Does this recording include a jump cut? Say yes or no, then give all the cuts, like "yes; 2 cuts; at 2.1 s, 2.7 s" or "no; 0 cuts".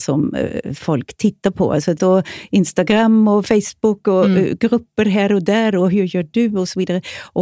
yes; 1 cut; at 2.0 s